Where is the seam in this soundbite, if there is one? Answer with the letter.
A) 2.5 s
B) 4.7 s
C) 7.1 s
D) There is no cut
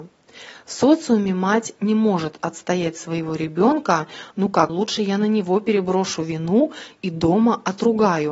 B